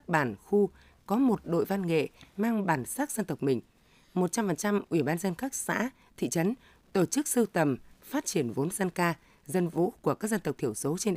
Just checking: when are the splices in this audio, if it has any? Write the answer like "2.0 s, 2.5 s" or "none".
7.9 s

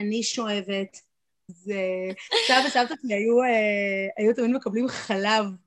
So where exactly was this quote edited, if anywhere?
1.5 s

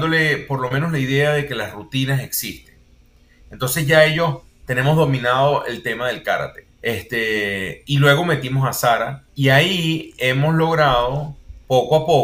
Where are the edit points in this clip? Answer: 6.7 s, 9.3 s

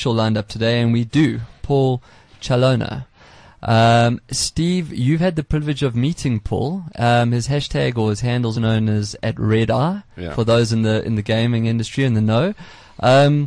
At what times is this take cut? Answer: 1.6 s, 8.5 s

